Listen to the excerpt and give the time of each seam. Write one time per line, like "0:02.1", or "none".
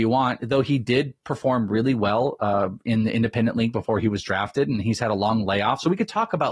none

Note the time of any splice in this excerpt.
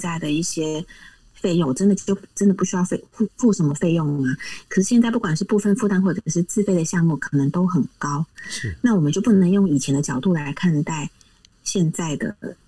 0:01.6

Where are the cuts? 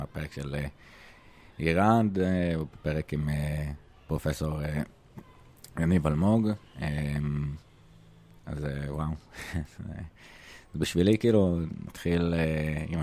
0:11.9

